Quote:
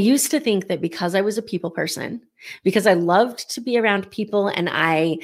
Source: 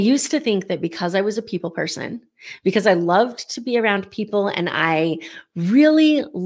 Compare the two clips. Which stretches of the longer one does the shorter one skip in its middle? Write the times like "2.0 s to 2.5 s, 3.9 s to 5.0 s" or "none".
none